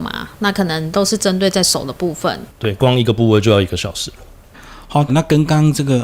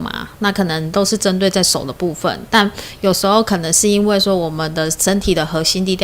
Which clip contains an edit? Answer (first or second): first